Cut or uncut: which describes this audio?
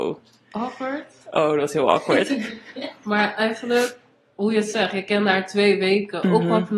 uncut